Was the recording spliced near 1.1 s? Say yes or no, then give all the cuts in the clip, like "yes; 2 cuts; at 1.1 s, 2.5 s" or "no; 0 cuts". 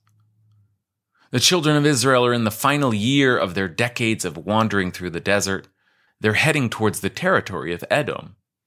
no; 1 cut; at 6.1 s